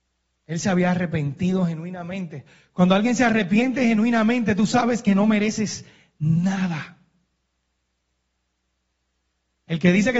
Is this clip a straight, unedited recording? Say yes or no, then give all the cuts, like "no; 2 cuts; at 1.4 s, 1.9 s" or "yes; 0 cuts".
yes; 0 cuts